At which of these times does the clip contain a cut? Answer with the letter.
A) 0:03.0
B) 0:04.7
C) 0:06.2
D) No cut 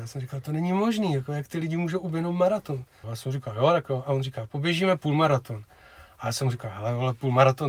A